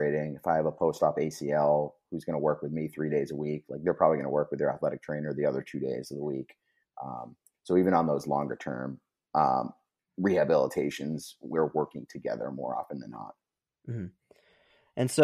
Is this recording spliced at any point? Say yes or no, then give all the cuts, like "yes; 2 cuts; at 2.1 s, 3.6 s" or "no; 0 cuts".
no; 0 cuts